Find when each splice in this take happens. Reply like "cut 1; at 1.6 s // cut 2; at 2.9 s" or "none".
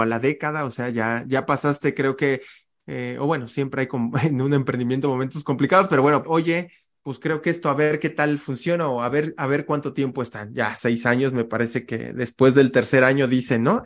cut 1; at 6.2 s